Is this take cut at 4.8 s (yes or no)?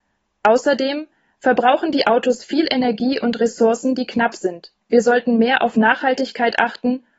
yes